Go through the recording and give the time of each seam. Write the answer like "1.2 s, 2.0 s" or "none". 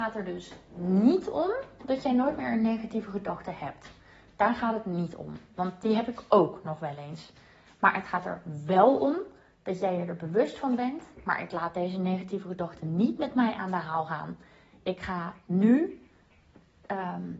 11.1 s